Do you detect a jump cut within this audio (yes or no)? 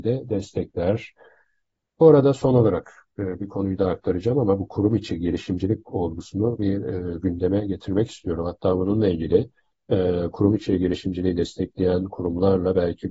no